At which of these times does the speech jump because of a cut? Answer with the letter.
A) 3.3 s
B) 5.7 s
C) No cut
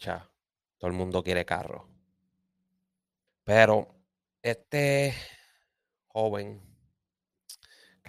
A